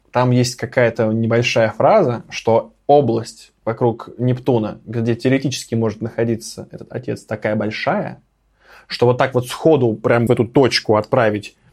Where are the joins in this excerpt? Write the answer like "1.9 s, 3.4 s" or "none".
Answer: 10.3 s